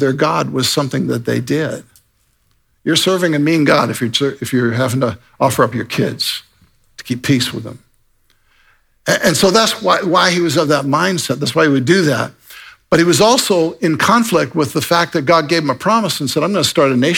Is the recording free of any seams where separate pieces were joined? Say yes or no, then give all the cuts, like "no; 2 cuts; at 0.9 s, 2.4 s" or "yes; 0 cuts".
yes; 0 cuts